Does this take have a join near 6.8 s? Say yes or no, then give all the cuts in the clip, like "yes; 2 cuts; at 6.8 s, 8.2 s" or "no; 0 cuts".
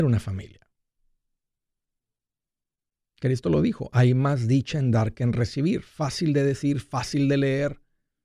no; 0 cuts